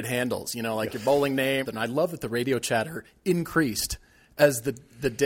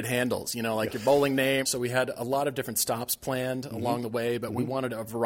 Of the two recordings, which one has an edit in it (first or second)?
first